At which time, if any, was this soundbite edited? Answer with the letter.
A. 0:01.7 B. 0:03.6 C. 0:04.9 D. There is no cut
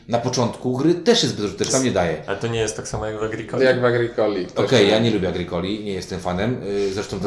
A